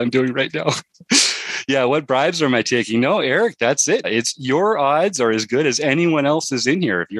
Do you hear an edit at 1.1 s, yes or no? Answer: no